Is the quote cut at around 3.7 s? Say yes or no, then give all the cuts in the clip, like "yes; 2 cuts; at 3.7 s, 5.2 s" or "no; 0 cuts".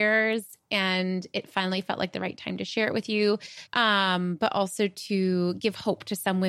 yes; 1 cut; at 3.7 s